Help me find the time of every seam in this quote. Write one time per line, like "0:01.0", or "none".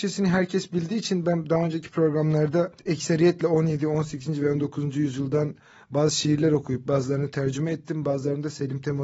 0:02.8